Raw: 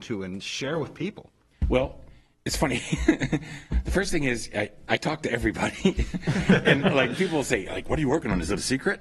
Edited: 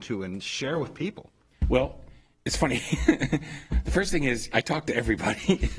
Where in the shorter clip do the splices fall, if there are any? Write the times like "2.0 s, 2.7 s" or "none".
4.5 s